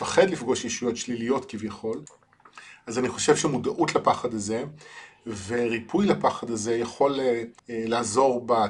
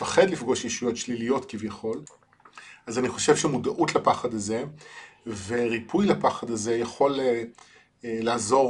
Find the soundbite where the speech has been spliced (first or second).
first